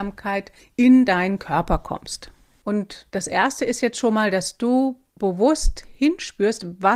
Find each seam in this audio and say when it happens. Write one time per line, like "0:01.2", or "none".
none